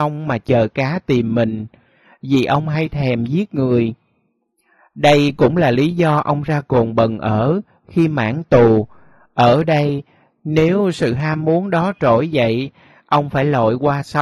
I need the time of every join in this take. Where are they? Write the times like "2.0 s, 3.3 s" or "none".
none